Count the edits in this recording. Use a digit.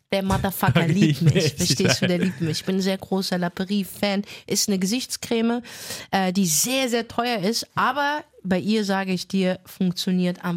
0